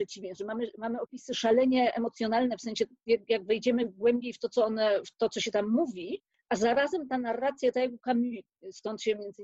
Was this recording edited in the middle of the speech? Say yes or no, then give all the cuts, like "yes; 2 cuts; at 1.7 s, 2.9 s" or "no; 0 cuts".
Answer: no; 0 cuts